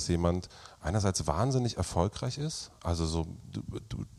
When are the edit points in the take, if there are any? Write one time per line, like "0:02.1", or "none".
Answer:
none